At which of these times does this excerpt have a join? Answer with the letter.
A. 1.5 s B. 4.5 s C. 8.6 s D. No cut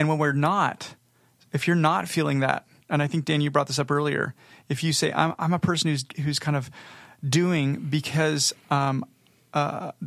D